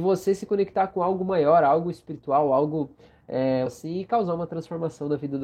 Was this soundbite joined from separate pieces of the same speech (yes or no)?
yes